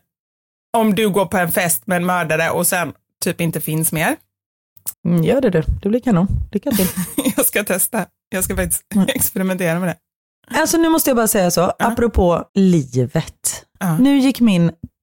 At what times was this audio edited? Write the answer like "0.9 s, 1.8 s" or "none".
4.9 s, 12.5 s